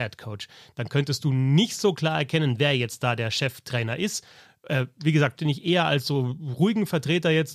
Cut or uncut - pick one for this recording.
cut